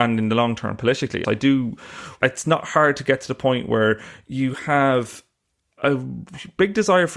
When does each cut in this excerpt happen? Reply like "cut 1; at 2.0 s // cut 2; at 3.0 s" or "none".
cut 1; at 1.2 s